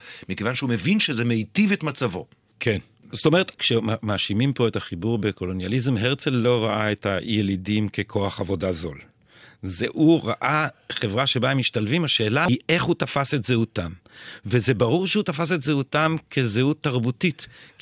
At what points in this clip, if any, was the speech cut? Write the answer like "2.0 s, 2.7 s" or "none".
none

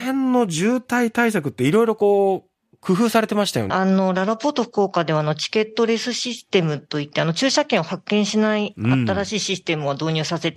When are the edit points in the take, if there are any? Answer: 3.7 s

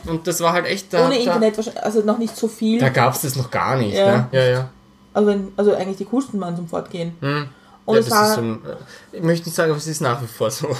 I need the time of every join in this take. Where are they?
4.3 s

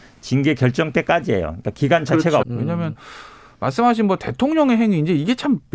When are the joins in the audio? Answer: 2.4 s

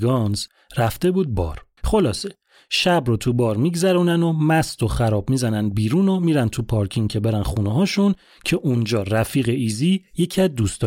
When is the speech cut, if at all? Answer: 1.8 s

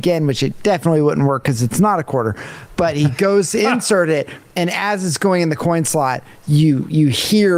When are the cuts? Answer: none

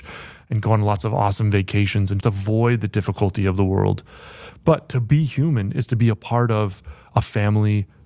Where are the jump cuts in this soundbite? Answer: 2.2 s

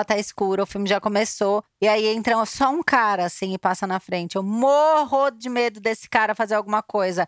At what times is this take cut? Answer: none

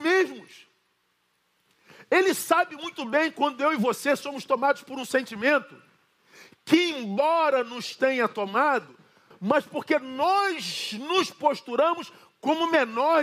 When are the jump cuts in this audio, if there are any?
9.3 s

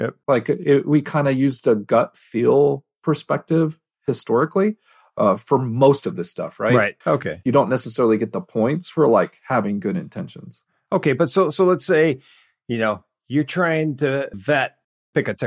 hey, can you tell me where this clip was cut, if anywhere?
7.0 s

